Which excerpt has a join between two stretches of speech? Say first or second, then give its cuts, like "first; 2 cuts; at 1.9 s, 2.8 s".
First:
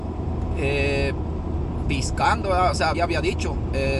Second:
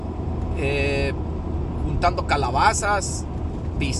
first; 2 cuts; at 1.8 s, 2.9 s